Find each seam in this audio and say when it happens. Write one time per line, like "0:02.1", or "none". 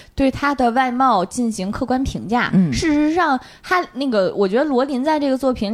none

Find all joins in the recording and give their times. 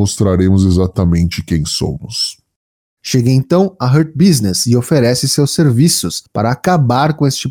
0:03.0

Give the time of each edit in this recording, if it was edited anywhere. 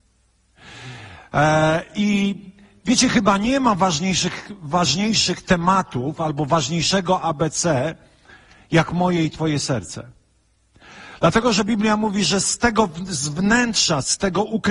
none

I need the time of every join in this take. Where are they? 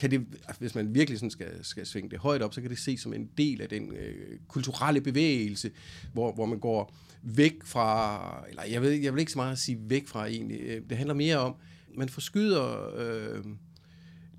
0:11.9

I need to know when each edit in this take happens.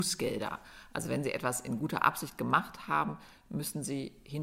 none

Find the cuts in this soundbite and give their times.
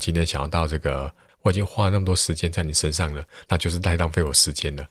0:01.3
0:03.5

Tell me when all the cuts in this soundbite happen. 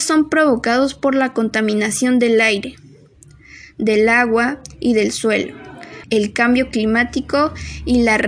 0:06.0

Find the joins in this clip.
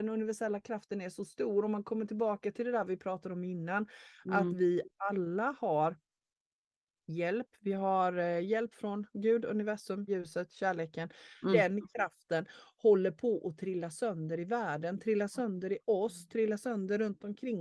0:10.1
0:11.5

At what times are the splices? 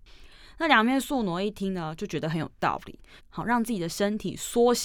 0:03.2

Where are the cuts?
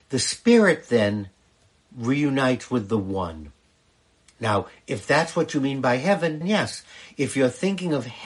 0:06.4

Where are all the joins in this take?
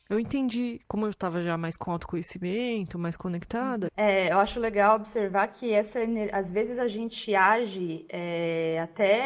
0:03.9

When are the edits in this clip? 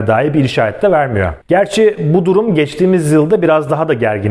0:01.4

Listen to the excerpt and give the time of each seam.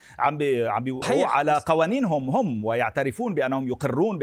0:01.0

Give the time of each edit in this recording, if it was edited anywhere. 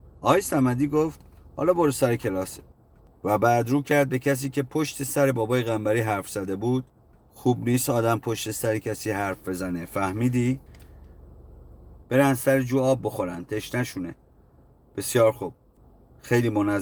0:12.0

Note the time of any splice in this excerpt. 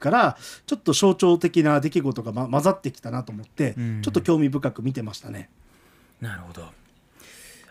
none

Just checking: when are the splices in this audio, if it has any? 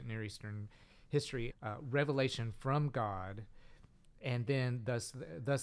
0:01.5

